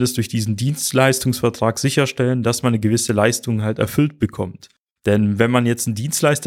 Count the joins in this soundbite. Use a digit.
1